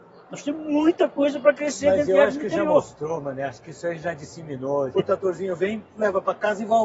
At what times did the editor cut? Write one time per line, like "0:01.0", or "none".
0:04.9

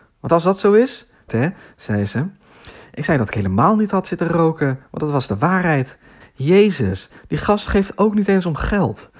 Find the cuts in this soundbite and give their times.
0:01.3
0:06.2

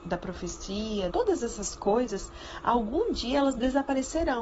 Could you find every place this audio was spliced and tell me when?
0:01.1

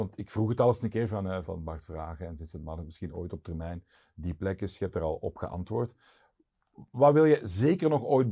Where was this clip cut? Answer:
0:01.4

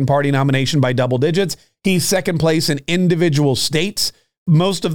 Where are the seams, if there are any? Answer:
none

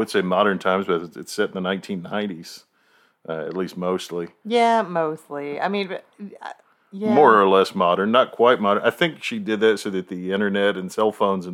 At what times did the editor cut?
none

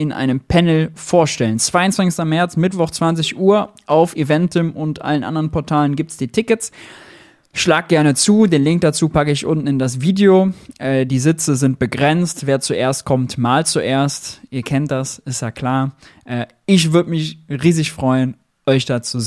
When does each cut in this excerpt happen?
none

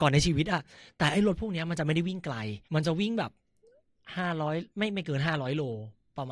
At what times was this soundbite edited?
0:02.6
0:04.7

